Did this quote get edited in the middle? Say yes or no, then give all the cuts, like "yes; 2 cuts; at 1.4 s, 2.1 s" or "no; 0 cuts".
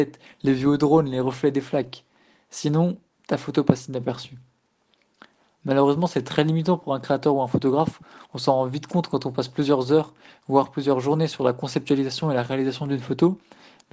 no; 0 cuts